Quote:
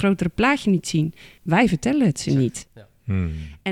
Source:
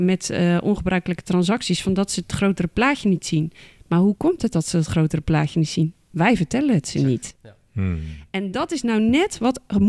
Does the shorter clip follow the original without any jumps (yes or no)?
no